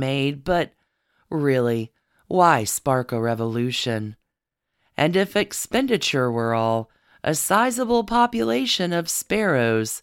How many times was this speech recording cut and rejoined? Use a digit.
0